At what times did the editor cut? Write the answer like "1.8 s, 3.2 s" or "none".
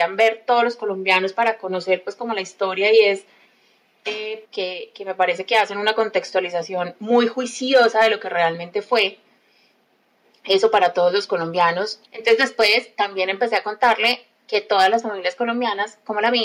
4.4 s, 12.0 s